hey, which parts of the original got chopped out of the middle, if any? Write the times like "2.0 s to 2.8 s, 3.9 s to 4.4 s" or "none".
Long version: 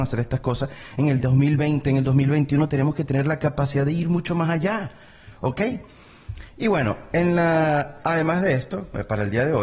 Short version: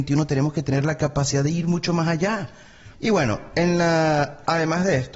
5.4 s to 6.5 s